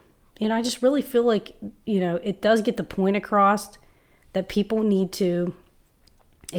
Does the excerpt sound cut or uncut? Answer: uncut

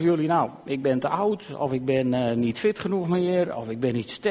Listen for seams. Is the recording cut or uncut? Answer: uncut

